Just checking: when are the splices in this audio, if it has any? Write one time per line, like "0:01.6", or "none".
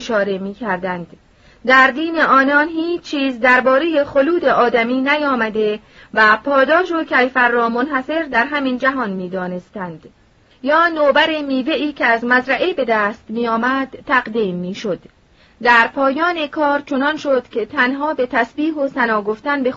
0:10.5